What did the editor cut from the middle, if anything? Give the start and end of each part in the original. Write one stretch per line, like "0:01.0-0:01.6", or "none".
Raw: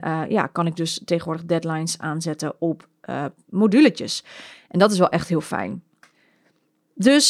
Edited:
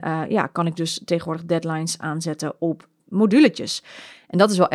0:03.0-0:03.4